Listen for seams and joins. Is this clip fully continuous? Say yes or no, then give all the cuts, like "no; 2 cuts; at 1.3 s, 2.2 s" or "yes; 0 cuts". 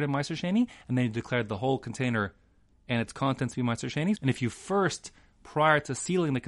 no; 1 cut; at 4.2 s